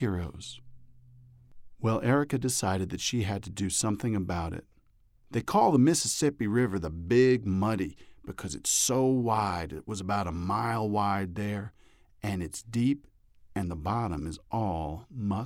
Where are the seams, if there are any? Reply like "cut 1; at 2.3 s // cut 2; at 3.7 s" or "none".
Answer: cut 1; at 5.2 s